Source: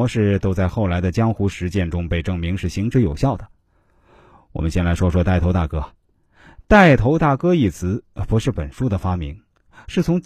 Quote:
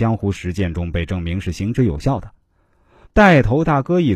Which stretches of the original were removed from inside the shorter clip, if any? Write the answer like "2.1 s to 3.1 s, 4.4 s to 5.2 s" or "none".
4.2 s to 6.6 s